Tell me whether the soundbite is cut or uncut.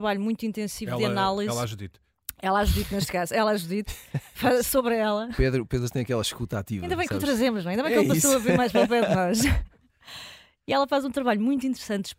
uncut